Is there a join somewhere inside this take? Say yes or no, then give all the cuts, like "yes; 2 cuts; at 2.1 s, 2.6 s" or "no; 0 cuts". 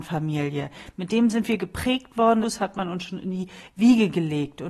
yes; 1 cut; at 2.4 s